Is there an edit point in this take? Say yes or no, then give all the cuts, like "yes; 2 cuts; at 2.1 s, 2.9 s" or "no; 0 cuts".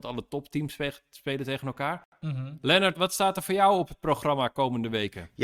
yes; 1 cut; at 2.9 s